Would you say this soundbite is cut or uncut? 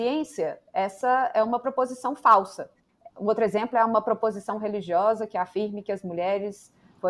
cut